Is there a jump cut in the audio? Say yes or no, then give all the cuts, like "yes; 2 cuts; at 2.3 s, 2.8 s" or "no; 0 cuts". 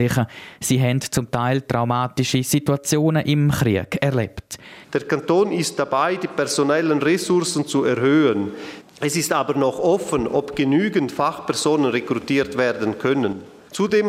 yes; 1 cut; at 4.8 s